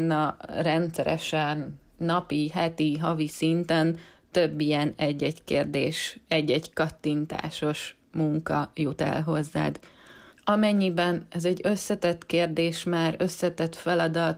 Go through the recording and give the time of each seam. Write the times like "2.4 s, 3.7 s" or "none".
10.3 s